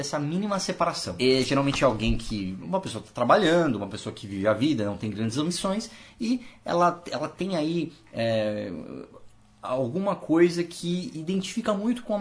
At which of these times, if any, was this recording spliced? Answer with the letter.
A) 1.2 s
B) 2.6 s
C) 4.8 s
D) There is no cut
A